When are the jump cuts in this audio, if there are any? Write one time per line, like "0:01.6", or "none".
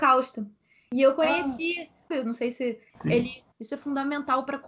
0:02.1
0:03.5

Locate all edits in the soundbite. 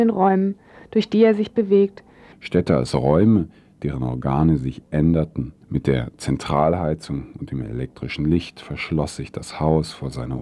0:02.3
0:05.6

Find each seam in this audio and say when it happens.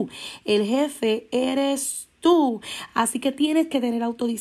none

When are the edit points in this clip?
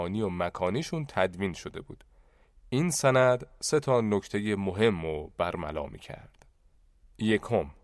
none

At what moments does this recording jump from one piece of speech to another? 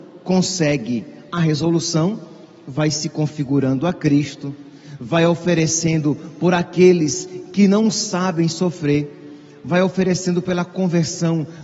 none

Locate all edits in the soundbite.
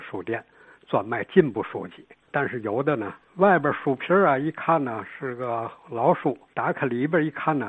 0:03.2
0:06.5

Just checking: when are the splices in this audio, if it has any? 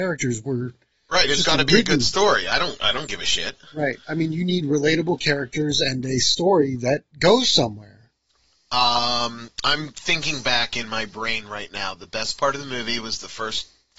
none

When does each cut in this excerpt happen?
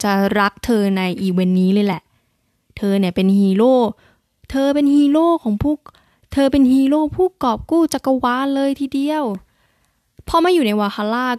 none

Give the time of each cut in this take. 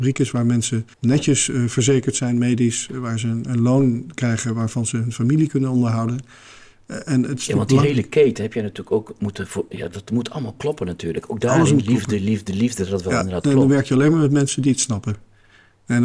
0:00.9

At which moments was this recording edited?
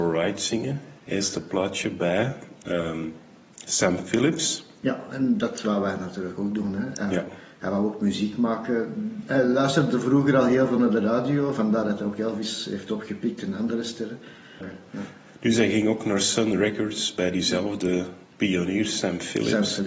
0:14.6
0:18.2

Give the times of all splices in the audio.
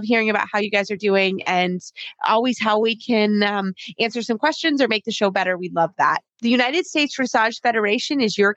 0:06.3

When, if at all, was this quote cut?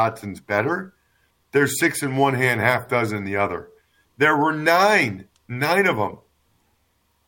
0:01.3
0:04.0

